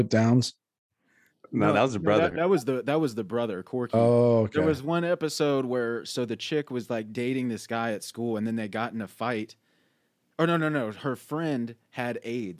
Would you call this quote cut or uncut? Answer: uncut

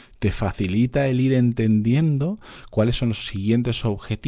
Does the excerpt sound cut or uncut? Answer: uncut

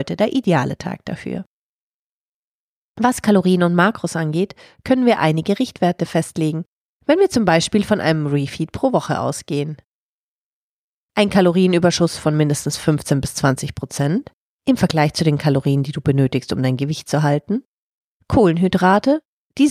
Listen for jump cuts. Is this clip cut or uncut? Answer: uncut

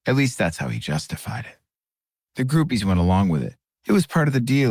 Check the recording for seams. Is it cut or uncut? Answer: uncut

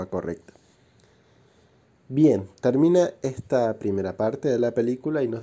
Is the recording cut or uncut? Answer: uncut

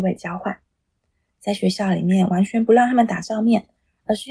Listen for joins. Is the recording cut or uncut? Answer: uncut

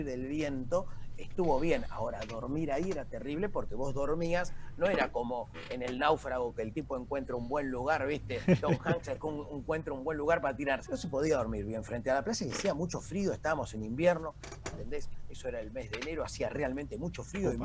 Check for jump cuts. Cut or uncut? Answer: cut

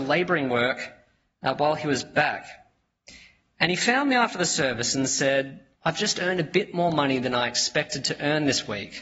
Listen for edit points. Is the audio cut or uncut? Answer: cut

